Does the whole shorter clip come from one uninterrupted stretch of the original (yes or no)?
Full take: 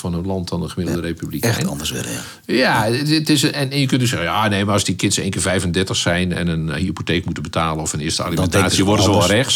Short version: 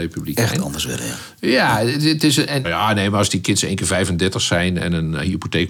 no